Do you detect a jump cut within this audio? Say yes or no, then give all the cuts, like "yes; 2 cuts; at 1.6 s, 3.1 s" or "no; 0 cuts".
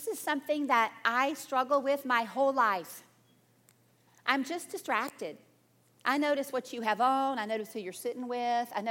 no; 0 cuts